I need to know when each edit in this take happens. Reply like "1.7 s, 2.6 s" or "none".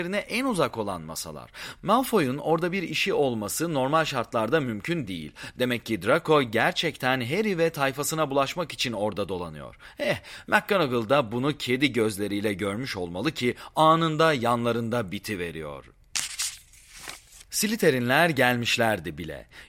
none